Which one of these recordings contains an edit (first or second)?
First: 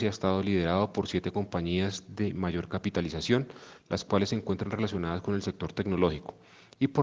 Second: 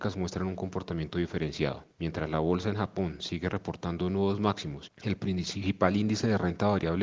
second